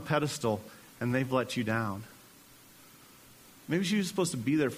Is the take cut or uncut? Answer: cut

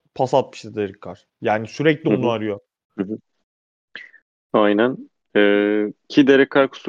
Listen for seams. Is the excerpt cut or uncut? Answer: cut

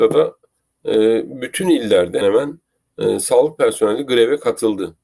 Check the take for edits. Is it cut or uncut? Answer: cut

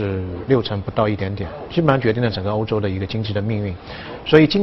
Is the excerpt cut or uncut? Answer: uncut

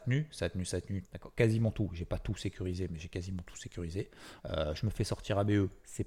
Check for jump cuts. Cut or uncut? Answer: cut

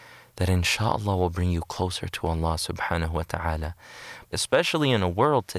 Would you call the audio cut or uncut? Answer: cut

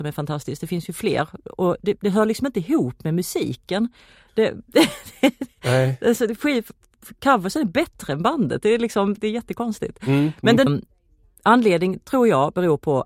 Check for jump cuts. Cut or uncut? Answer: cut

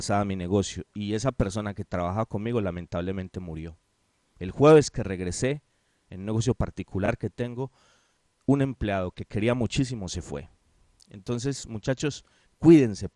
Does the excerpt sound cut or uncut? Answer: uncut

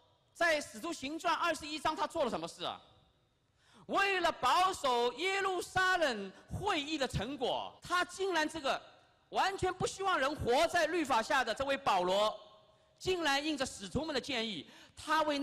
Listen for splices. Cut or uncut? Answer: cut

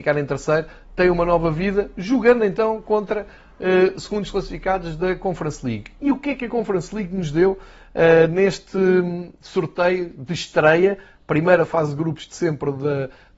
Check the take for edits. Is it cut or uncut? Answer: uncut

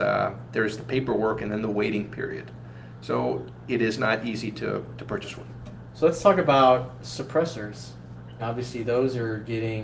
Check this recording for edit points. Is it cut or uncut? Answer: cut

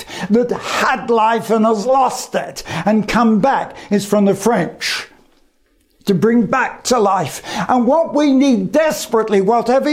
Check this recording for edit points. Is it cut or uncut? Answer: uncut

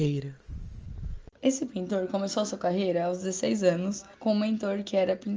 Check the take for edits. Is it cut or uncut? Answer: cut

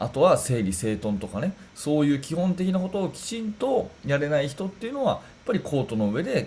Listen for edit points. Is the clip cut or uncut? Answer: uncut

